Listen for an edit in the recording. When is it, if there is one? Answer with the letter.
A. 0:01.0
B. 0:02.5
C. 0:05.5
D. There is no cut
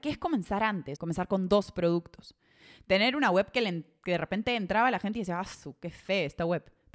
A